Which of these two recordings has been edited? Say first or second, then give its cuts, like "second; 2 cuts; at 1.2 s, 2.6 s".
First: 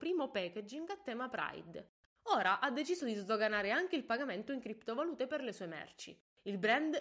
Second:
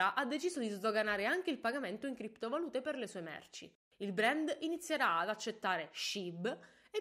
first; 1 cut; at 2.1 s